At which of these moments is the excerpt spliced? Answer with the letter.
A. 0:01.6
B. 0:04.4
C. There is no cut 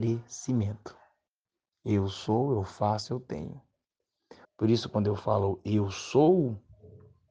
B